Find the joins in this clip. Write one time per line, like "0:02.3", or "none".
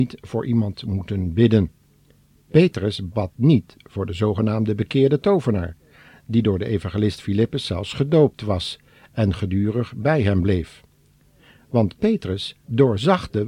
none